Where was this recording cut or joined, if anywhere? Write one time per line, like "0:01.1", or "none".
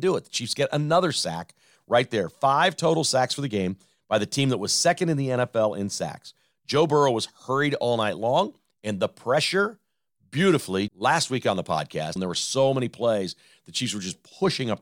0:10.9
0:12.2